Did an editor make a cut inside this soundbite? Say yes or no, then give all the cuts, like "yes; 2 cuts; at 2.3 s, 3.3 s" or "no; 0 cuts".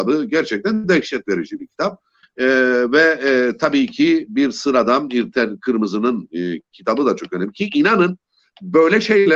yes; 1 cut; at 2.2 s